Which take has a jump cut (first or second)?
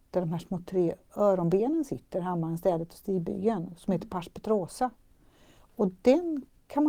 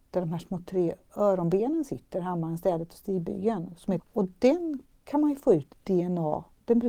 second